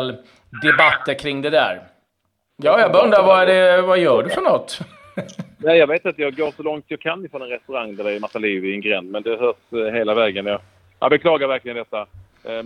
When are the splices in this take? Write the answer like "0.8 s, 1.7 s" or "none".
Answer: 2.5 s